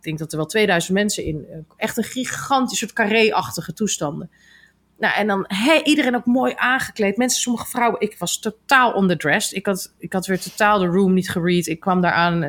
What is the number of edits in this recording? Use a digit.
0